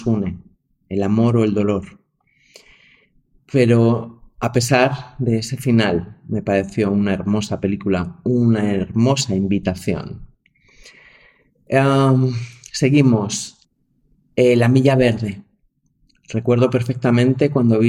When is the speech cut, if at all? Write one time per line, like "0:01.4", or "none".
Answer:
none

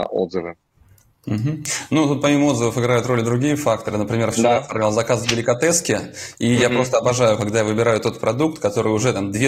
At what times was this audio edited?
none

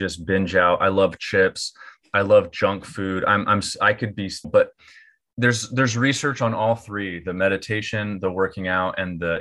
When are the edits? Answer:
0:04.4

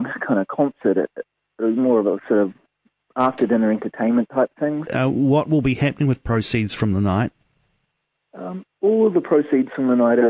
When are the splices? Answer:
0:04.9
0:08.7

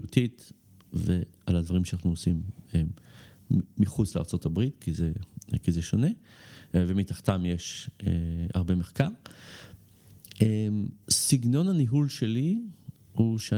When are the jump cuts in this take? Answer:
0:11.0

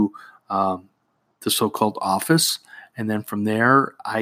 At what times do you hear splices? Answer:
none

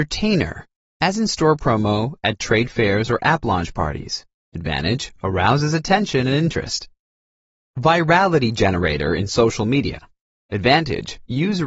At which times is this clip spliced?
0:07.7

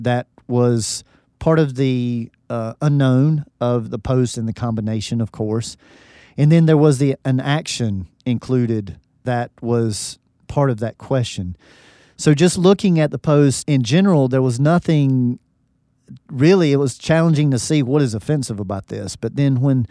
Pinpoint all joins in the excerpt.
0:03.8

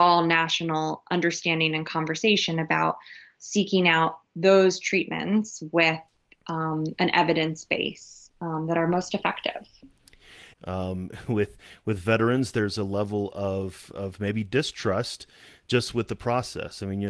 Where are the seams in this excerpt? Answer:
0:10.5

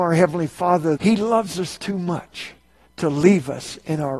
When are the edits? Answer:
0:01.0

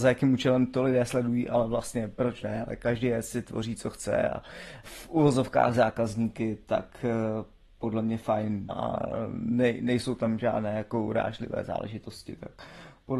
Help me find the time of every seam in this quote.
0:04.8
0:08.7

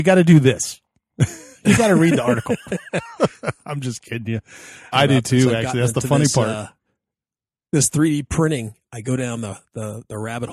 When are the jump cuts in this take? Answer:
0:04.9

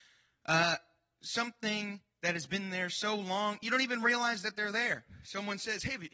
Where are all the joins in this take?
none

